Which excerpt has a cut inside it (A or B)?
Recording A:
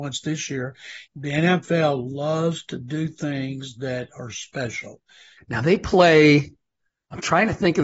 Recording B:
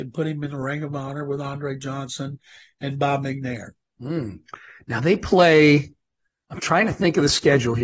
A